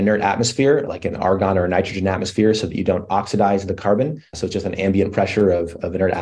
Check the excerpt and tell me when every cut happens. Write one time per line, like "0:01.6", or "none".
none